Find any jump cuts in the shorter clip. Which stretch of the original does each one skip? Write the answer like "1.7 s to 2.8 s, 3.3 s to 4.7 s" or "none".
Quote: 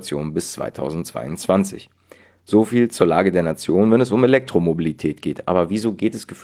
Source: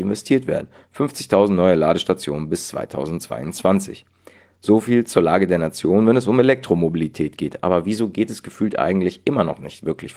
none